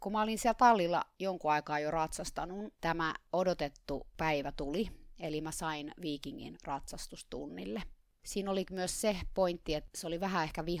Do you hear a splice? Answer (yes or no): yes